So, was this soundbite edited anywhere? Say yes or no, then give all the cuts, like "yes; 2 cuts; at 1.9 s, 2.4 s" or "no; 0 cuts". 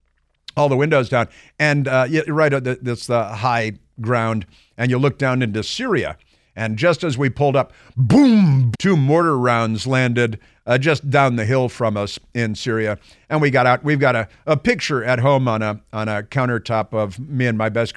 yes; 1 cut; at 8.7 s